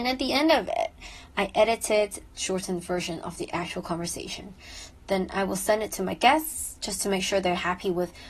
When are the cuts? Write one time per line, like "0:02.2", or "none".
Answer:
0:02.3